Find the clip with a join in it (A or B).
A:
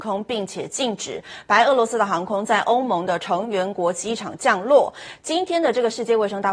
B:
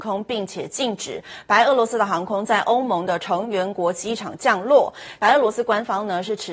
B